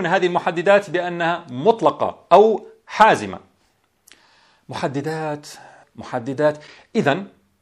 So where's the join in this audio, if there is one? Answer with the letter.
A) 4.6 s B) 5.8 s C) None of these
B